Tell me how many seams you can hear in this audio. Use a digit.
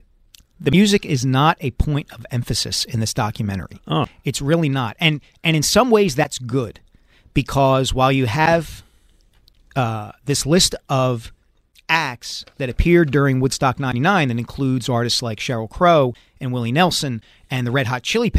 0